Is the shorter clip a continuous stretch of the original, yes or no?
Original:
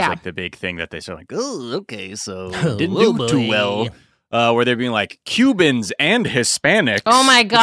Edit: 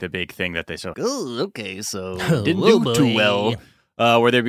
no